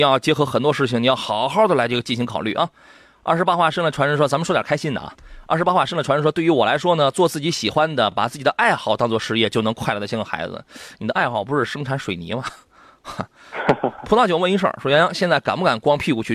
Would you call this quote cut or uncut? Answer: uncut